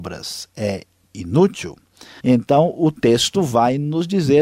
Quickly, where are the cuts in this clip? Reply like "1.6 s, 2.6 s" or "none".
2.2 s